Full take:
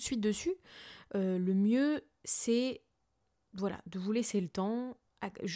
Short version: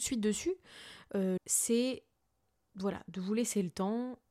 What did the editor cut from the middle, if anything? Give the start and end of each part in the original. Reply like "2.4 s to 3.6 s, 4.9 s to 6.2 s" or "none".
1.4 s to 2.2 s